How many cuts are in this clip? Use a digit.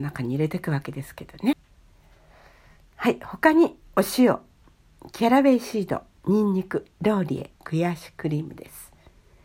0